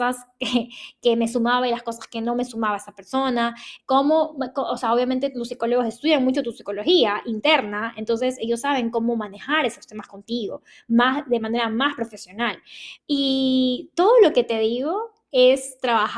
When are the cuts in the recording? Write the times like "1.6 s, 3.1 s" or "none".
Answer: 3.8 s, 13.0 s